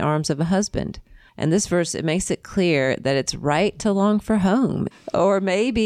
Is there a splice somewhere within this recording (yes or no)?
yes